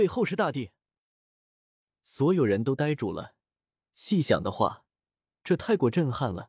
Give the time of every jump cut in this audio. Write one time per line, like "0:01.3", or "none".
none